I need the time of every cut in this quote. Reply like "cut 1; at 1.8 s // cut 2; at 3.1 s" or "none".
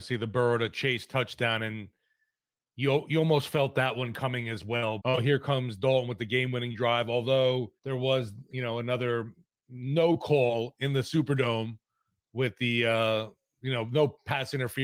cut 1; at 5.0 s // cut 2; at 7.8 s